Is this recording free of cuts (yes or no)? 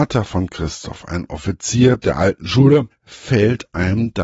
no